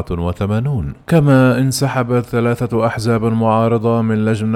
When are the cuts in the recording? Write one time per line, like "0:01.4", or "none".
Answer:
0:01.0